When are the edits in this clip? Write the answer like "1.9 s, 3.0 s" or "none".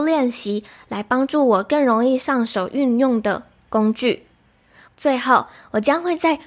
4.9 s